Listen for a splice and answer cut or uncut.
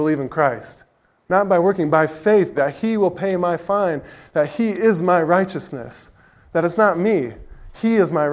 cut